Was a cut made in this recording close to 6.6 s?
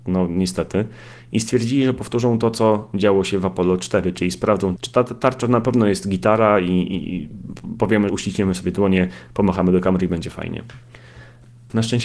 no; 2 cuts; at 4.8 s, 8.1 s

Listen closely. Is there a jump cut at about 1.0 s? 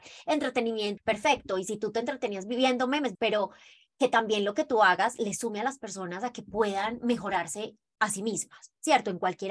yes; 2 cuts; at 1.0 s, 3.2 s

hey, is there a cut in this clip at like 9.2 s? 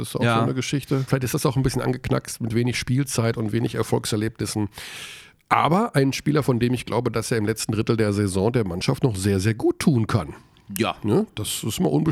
no; 1 cut; at 1.1 s

